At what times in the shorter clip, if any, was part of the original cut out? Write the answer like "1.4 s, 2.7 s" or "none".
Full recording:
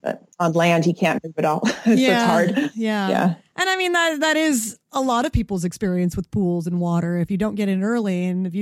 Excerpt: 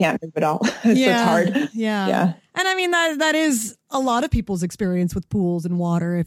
none